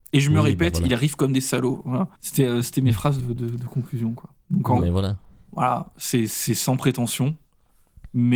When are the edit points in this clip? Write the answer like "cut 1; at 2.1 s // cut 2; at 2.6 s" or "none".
cut 1; at 2.1 s // cut 2; at 3.2 s // cut 3; at 4.8 s